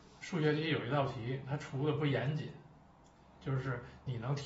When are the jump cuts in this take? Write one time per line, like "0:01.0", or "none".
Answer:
0:03.3